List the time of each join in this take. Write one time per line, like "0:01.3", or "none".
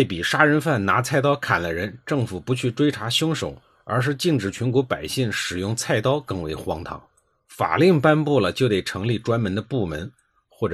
none